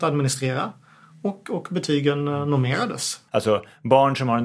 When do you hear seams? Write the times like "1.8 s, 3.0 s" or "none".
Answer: 3.3 s